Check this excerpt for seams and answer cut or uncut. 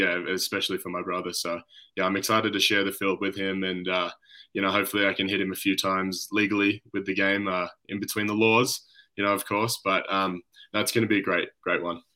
uncut